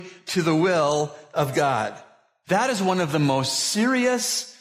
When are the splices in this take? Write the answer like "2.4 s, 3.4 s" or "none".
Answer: 2.4 s